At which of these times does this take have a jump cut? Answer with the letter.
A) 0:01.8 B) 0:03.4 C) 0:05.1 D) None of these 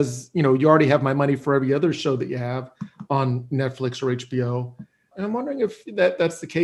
C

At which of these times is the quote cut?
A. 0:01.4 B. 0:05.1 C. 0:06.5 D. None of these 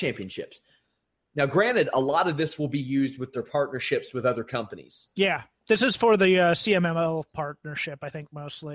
D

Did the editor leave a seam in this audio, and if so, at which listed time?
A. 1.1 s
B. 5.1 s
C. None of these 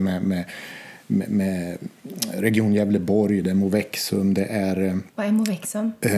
B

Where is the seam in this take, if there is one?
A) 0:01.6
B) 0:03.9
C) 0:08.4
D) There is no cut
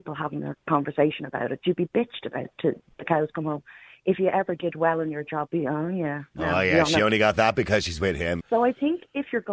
C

